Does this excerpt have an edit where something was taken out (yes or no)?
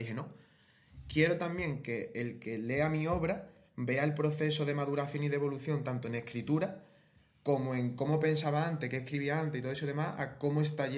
no